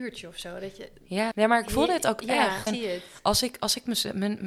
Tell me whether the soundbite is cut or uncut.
cut